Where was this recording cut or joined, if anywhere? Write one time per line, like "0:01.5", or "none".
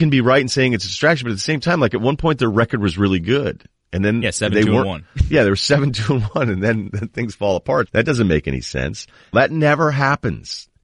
0:07.9
0:09.3